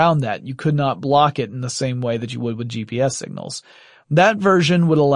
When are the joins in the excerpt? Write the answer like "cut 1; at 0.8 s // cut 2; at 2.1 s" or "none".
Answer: cut 1; at 4.0 s